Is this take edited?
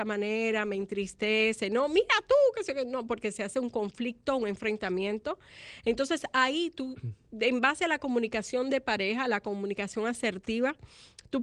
no; 0 cuts

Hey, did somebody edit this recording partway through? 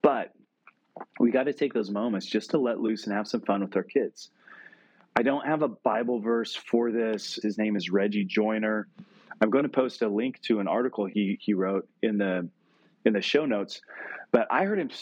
yes; 1 cut; at 7.4 s

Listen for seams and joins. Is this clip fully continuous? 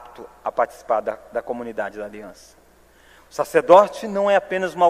yes; 0 cuts

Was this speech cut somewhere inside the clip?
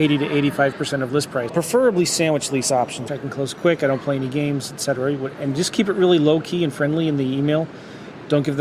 yes; 2 cuts; at 1.5 s, 3.1 s

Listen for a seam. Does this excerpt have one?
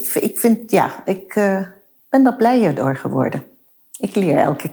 no; 0 cuts

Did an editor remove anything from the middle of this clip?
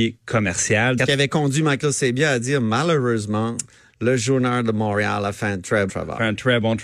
yes; 2 cuts; at 1.0 s, 5.9 s

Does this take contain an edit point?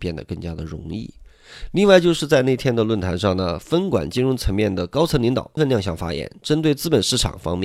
yes; 1 cut; at 5.6 s

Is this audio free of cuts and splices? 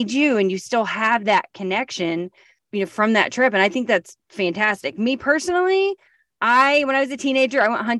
yes; 0 cuts

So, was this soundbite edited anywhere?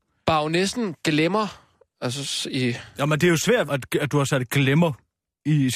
yes; 1 cut; at 3.7 s

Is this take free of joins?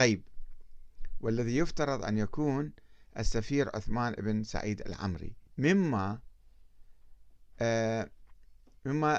no; 1 cut; at 5.5 s

